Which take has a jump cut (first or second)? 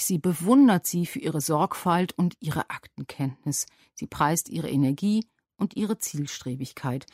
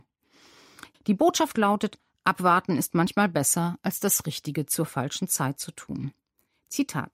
second